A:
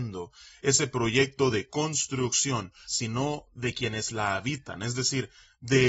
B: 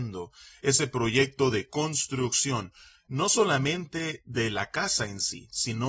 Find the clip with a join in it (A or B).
A